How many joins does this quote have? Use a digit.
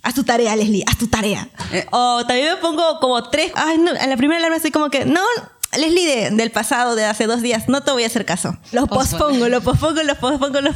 2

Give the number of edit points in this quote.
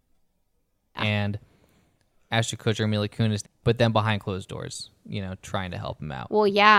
2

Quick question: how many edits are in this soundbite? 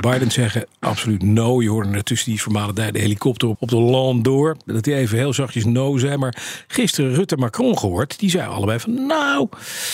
1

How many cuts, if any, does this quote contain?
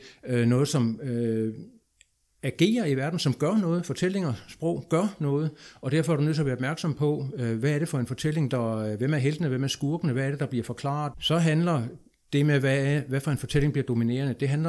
2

